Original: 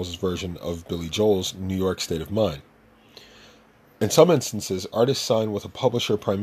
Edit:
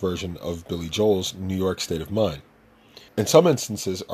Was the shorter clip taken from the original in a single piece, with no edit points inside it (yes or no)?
no